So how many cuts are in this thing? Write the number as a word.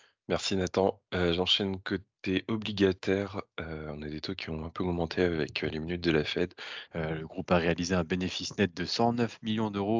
one